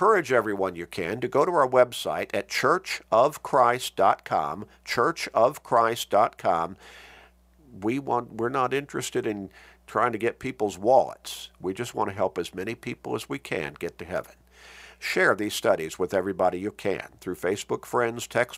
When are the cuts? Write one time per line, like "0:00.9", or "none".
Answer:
0:07.6